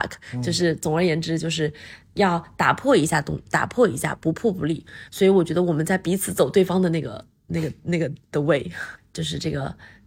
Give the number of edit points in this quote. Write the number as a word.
two